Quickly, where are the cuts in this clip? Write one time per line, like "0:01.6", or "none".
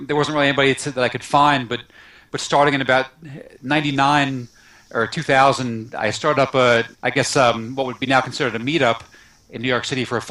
0:06.9

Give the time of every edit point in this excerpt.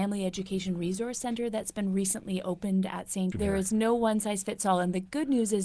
0:03.3

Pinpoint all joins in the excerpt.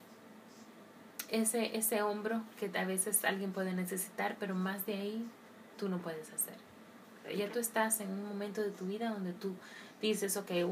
0:07.2

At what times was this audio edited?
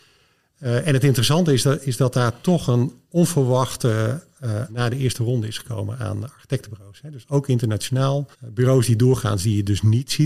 0:04.7
0:08.3

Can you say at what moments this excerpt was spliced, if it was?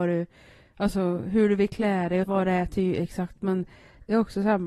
0:02.2

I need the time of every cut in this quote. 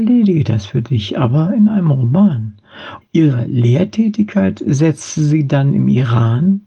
0:03.0

